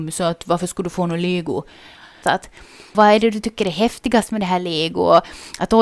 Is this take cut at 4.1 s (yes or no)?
no